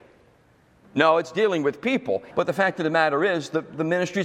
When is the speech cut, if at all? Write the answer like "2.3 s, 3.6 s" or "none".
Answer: 2.3 s